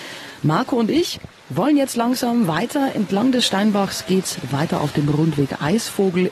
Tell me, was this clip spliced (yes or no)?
no